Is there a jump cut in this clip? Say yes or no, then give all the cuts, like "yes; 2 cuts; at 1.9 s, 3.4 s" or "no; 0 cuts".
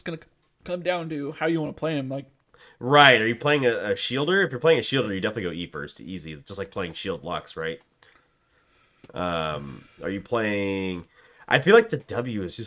no; 0 cuts